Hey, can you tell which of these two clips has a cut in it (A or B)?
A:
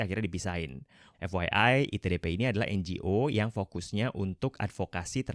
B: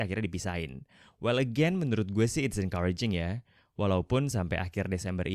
A